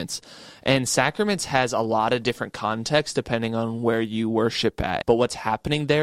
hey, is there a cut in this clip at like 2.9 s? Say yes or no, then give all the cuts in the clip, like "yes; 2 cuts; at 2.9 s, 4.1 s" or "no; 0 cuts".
no; 1 cut; at 5.0 s